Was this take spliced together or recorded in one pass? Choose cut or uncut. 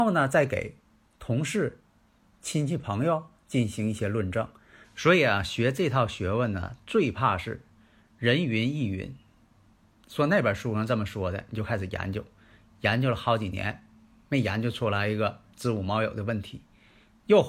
cut